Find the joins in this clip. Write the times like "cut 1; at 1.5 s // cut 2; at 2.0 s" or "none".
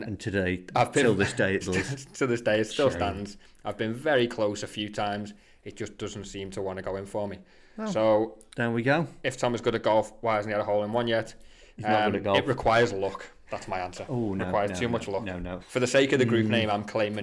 cut 1; at 1.6 s // cut 2; at 15.6 s